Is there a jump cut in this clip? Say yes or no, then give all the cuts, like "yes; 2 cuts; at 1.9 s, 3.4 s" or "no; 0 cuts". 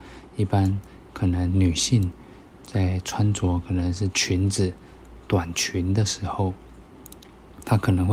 no; 0 cuts